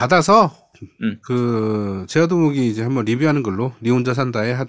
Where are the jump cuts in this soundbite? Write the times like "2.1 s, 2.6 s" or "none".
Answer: none

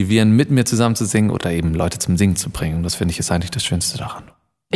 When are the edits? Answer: none

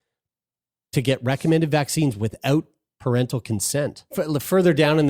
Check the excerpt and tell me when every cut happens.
4.1 s

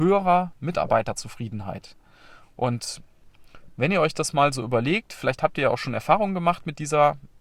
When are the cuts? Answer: none

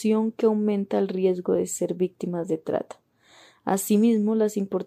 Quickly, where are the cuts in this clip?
none

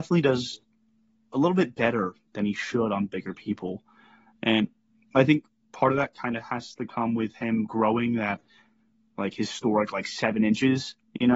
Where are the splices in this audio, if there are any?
none

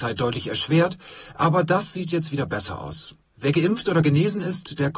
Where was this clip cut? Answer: none

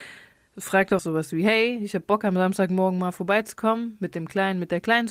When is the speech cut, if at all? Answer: 1.0 s

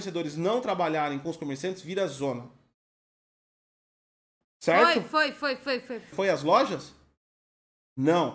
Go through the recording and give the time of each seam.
4.4 s, 6.1 s

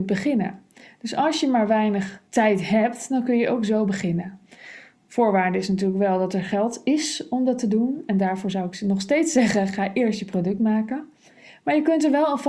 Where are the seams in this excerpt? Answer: 2.3 s

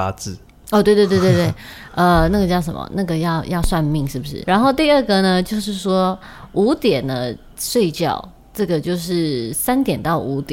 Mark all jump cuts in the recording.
4.4 s

